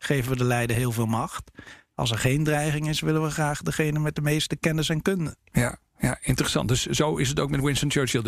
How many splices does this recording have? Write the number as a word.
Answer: zero